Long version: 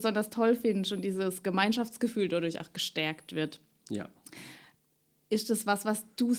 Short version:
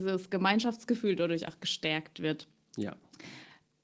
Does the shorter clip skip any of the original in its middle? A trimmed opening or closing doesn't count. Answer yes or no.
no